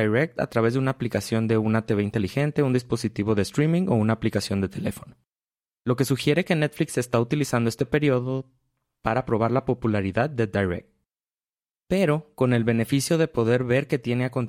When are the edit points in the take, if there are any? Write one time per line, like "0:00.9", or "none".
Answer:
0:11.7